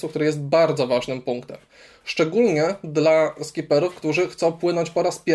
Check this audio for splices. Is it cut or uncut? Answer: uncut